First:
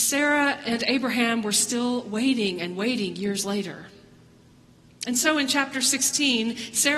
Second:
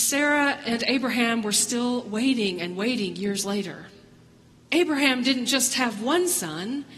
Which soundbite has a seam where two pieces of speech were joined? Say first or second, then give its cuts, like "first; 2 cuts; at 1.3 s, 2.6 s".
second; 1 cut; at 4.6 s